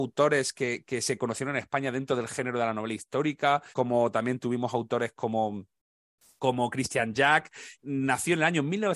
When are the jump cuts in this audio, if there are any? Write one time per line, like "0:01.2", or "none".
0:03.7
0:07.7